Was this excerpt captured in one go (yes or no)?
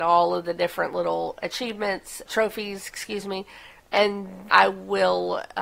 no